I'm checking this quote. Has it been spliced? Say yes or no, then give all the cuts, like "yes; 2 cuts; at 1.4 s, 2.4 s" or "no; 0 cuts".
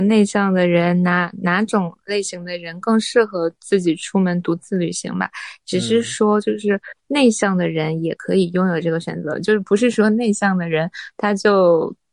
no; 0 cuts